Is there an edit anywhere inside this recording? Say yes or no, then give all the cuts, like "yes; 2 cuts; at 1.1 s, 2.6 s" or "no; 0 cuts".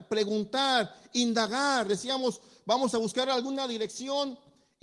no; 0 cuts